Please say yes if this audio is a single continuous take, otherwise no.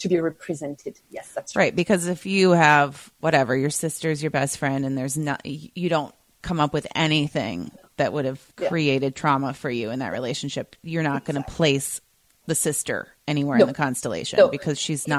no